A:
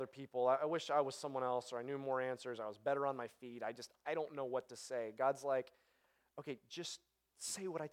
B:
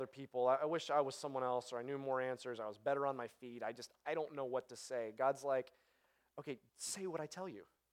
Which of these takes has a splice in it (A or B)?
B